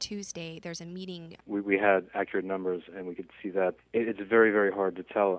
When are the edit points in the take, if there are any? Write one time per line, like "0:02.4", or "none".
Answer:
0:01.4
0:03.8